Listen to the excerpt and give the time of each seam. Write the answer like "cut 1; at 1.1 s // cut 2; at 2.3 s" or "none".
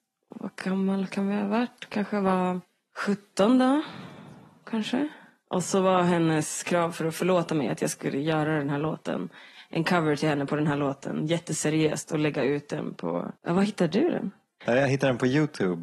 cut 1; at 13.4 s

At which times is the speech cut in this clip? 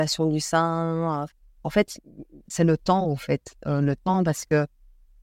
cut 1; at 2.5 s

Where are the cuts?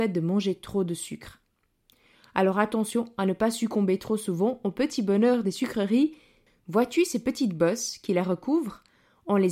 cut 1; at 6.5 s

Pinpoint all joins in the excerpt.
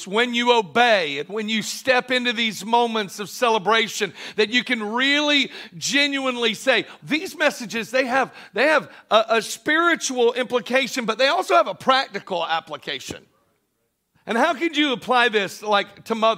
cut 1; at 7.0 s // cut 2; at 14.1 s

